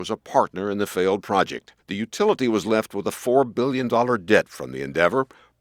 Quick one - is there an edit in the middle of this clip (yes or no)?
yes